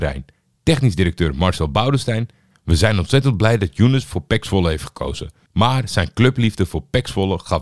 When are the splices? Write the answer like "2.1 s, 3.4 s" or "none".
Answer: 5.5 s